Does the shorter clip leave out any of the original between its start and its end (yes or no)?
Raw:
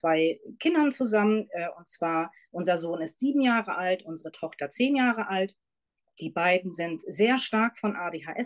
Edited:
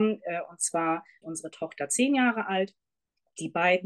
yes